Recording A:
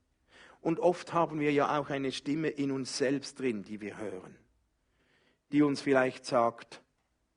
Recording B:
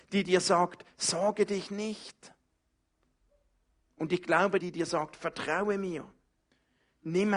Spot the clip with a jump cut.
B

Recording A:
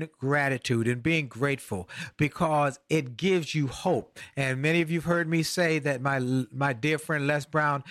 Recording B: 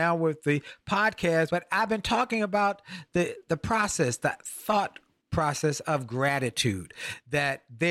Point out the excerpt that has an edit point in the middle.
B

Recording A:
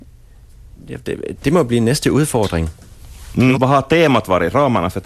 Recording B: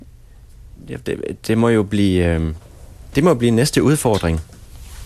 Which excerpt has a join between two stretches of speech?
A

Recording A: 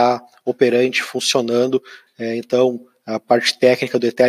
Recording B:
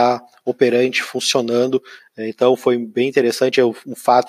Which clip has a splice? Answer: B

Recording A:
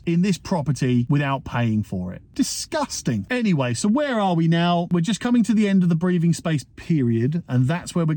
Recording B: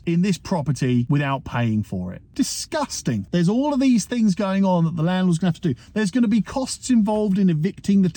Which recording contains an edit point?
B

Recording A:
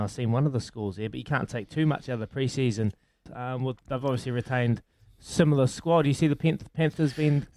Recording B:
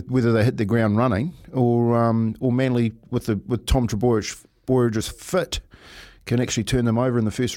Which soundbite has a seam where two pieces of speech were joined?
A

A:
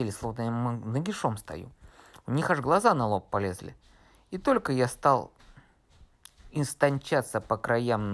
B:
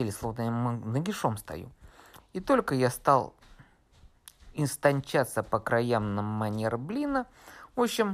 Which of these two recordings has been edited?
B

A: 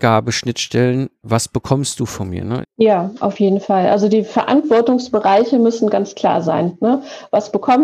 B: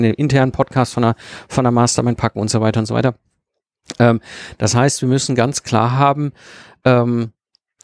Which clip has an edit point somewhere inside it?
A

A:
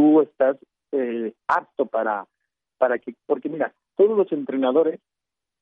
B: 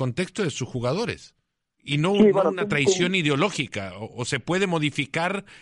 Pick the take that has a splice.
B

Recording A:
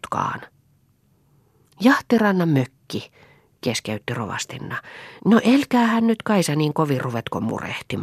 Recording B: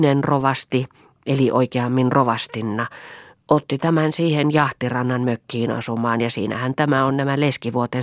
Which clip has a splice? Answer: A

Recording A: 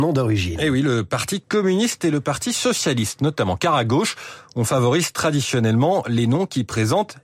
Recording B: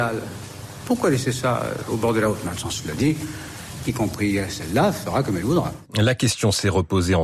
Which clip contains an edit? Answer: B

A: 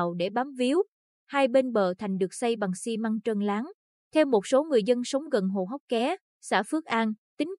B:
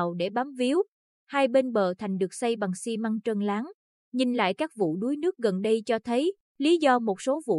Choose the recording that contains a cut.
A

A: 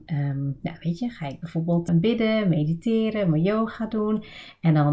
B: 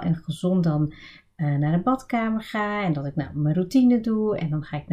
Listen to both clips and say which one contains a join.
A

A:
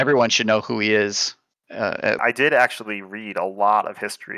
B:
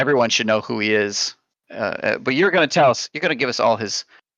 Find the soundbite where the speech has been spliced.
A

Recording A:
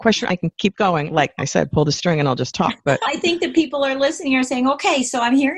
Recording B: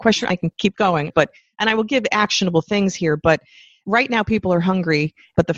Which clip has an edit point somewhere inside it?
B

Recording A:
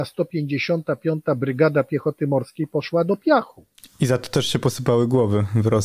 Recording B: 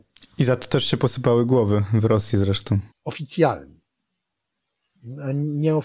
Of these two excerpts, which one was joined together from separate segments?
B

